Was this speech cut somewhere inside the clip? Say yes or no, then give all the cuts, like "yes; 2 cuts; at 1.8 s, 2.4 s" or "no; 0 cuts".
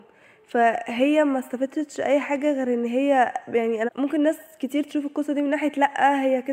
yes; 1 cut; at 3.9 s